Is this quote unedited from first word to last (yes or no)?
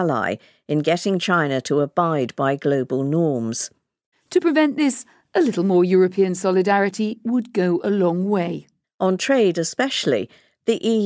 no